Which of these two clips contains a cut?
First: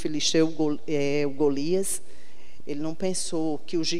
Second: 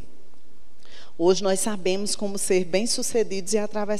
first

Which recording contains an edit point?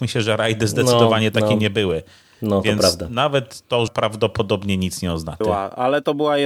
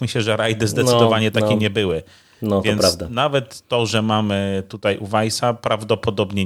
first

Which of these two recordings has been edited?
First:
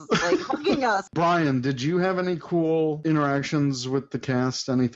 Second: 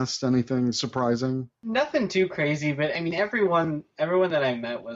first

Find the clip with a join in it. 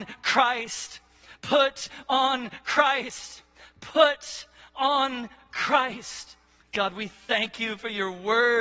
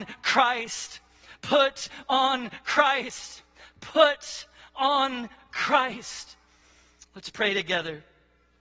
first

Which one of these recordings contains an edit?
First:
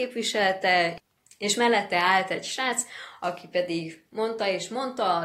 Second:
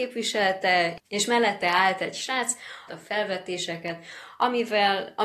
second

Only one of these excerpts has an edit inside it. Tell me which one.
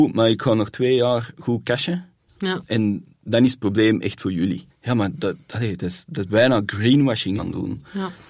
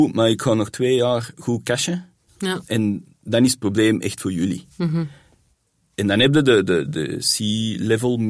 first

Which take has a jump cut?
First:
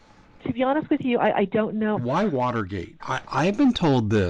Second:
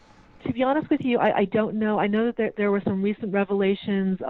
first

